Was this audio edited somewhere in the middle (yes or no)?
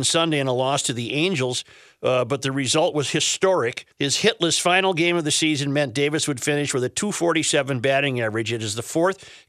yes